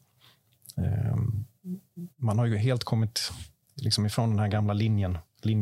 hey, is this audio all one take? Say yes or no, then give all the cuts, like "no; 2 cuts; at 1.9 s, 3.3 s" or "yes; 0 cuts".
yes; 0 cuts